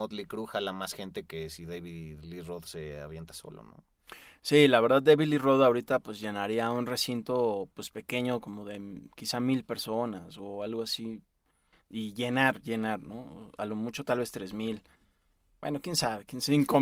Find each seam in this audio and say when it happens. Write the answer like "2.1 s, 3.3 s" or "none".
none